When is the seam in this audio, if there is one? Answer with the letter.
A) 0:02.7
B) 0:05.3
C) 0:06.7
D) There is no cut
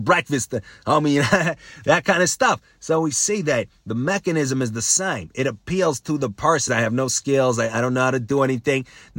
C